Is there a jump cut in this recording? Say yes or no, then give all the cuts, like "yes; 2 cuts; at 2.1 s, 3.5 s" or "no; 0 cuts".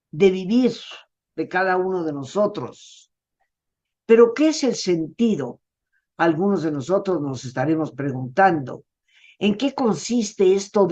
yes; 1 cut; at 3.9 s